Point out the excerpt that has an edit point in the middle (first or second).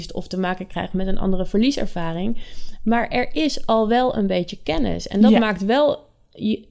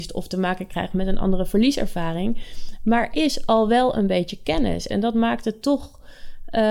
second